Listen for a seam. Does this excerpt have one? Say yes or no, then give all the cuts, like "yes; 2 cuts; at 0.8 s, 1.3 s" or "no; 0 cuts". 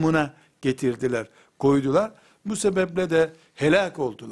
no; 0 cuts